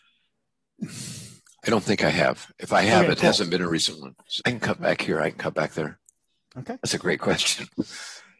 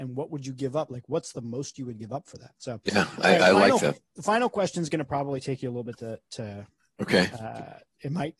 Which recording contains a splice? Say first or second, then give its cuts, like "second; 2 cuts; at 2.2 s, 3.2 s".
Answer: first; 1 cut; at 4.4 s